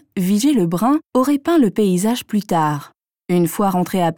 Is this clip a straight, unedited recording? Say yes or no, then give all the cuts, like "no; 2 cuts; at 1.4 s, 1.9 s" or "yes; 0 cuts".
no; 1 cut; at 1.1 s